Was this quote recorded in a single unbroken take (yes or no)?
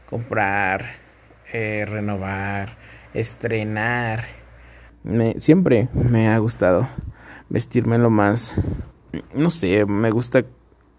no